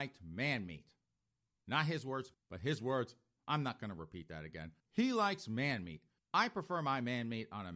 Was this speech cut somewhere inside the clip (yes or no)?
yes